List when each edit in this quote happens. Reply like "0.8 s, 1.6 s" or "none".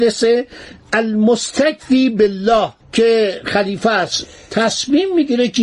2.8 s